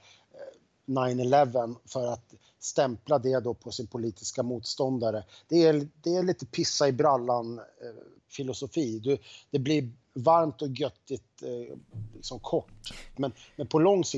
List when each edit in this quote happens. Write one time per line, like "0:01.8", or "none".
0:13.1